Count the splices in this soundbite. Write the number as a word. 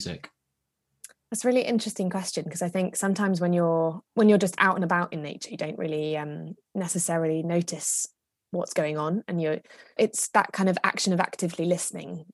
two